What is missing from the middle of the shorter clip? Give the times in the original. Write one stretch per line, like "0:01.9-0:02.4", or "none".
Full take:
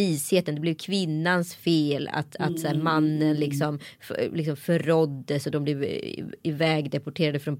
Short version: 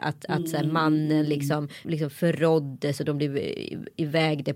0:04.0-0:04.3